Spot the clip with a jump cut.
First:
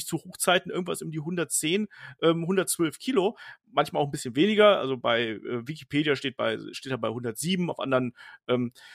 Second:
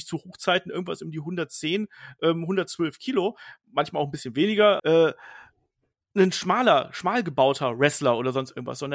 second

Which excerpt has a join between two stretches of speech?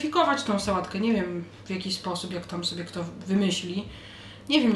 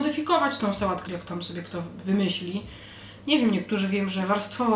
second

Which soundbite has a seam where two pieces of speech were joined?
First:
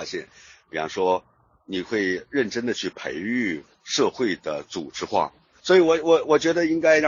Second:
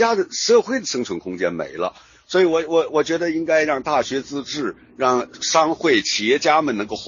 first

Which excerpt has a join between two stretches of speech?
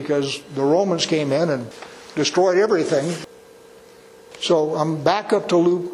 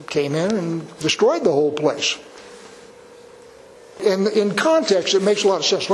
first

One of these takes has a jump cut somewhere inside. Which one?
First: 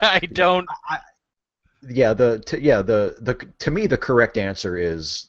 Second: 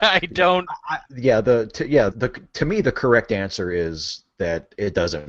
second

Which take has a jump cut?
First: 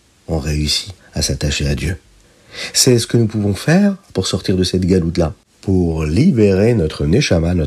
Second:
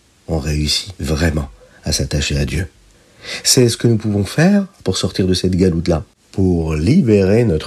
first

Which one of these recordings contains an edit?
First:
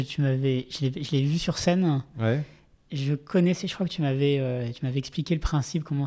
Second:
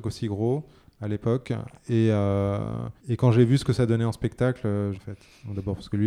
second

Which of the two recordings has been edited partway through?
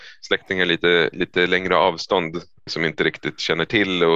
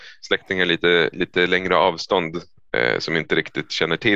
first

